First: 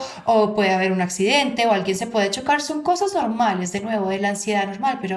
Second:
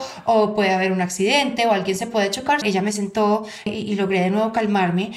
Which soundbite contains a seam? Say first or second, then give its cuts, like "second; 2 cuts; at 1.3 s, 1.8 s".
second; 2 cuts; at 2.6 s, 3.7 s